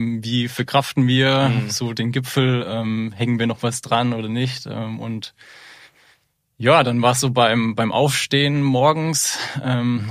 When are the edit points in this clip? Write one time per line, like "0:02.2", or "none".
none